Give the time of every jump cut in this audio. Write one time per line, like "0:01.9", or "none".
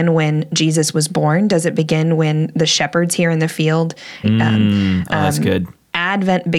0:04.2